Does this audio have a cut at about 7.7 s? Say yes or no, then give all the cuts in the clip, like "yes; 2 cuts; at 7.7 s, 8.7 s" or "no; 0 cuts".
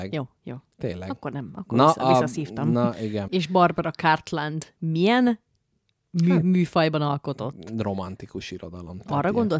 no; 1 cut; at 3.3 s